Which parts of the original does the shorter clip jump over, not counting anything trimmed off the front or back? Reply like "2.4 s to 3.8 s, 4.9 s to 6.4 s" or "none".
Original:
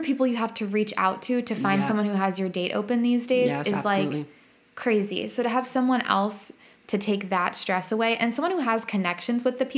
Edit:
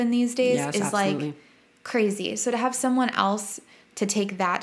none